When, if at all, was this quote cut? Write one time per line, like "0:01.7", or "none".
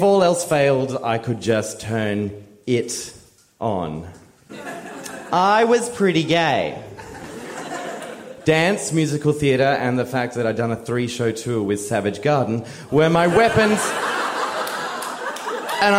0:04.5